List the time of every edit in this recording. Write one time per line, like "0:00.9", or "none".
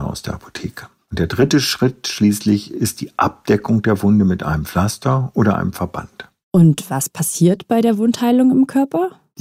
none